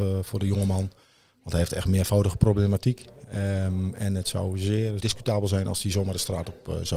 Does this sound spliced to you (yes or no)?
yes